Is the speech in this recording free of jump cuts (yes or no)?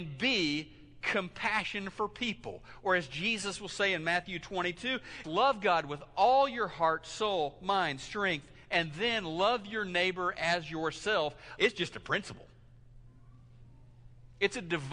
no